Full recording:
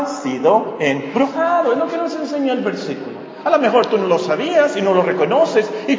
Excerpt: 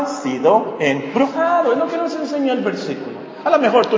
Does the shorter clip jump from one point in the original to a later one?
no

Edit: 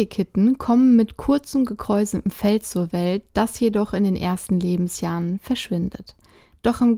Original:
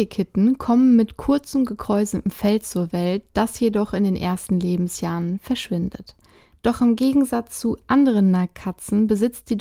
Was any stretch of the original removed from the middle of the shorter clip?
no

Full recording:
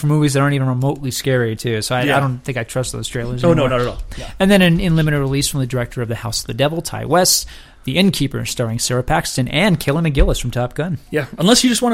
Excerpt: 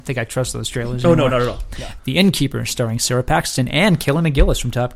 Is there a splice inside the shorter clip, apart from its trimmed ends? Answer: yes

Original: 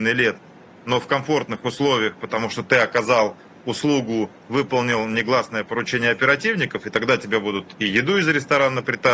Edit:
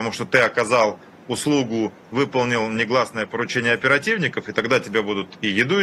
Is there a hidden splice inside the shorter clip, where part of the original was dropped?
no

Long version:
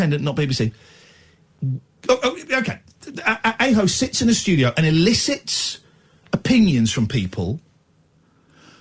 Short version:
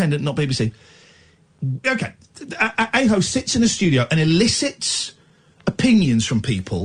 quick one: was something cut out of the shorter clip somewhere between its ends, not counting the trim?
yes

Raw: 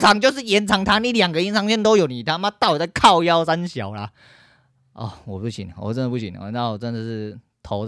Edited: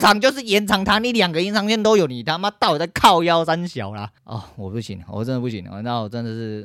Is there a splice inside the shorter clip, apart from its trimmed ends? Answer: yes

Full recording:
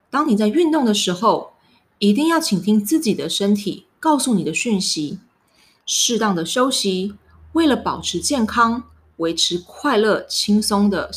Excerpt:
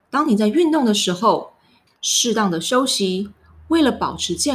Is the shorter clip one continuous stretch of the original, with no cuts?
no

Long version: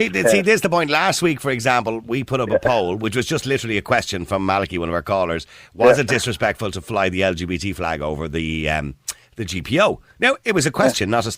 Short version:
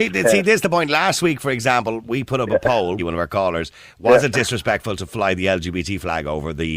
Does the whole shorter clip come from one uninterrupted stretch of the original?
no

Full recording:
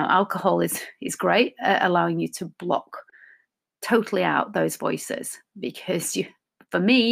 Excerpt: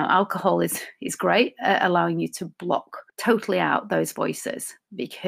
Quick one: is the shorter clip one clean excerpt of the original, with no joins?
no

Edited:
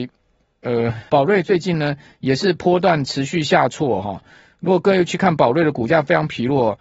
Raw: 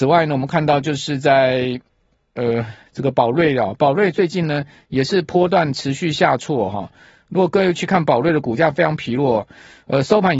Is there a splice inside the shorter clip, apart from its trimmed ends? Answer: yes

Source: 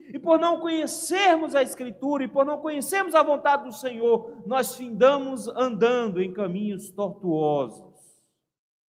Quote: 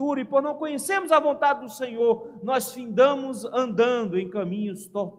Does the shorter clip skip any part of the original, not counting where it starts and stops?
no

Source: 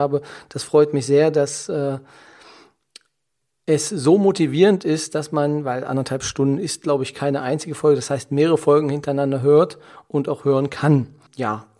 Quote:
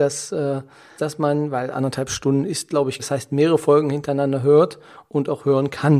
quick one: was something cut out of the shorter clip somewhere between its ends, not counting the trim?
yes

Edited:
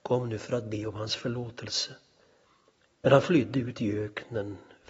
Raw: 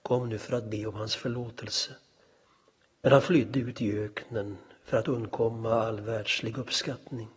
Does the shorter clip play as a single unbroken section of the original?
yes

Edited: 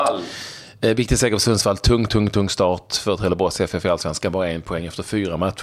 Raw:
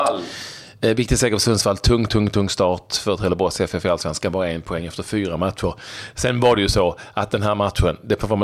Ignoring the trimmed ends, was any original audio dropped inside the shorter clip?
no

